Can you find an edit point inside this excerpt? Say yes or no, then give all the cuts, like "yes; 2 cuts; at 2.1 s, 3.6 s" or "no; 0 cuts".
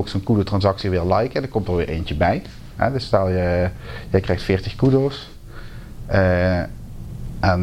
no; 0 cuts